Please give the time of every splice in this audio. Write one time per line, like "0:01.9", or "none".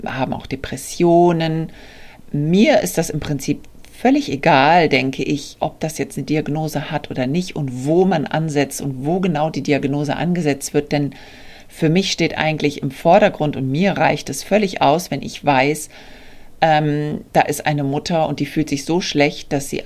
none